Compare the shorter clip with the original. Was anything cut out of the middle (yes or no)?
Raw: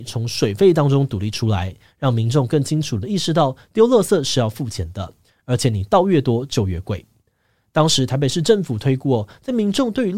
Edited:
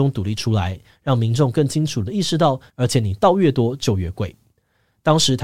yes